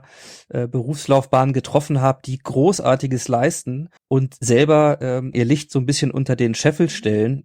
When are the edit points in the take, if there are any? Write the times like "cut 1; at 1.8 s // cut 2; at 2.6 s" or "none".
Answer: cut 1; at 4.0 s // cut 2; at 5.3 s